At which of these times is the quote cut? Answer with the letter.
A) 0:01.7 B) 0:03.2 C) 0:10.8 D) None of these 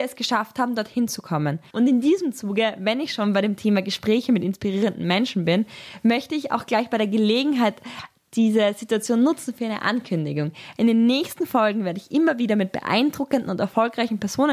A